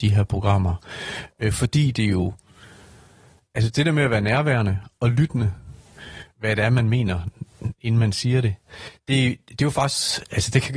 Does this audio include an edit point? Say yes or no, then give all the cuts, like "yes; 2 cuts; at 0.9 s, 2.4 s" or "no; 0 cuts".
yes; 1 cut; at 6.3 s